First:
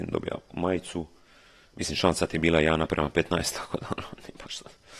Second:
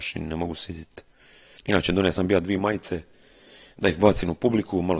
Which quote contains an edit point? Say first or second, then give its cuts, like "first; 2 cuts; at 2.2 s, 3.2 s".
second; 1 cut; at 1.6 s